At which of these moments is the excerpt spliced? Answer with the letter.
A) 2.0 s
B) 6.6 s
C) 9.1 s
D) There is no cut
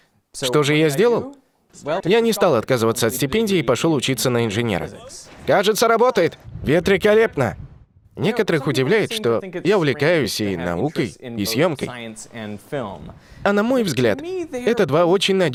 A